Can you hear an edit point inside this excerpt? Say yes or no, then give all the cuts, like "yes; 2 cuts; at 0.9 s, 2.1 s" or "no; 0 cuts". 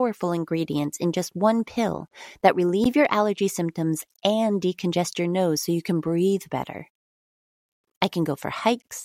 yes; 1 cut; at 7.8 s